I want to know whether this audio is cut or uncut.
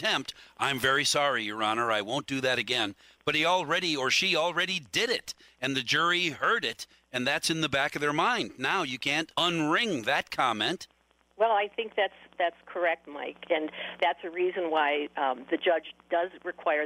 cut